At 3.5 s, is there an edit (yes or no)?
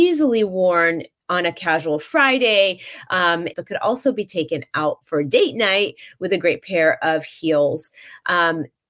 yes